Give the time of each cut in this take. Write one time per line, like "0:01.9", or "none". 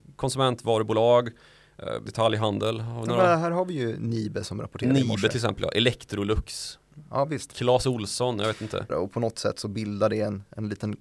0:02.1
0:08.9